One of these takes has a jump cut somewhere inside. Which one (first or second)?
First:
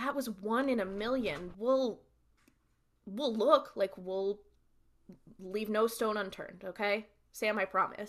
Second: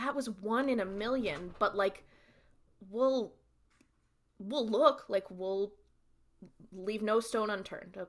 first